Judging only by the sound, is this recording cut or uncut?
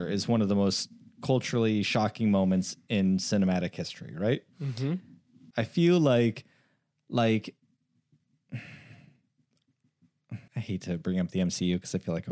cut